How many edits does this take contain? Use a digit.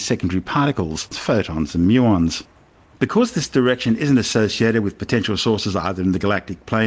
2